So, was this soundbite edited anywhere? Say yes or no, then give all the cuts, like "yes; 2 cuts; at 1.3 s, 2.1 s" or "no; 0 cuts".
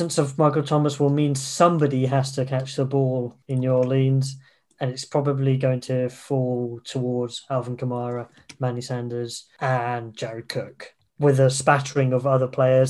yes; 1 cut; at 3.4 s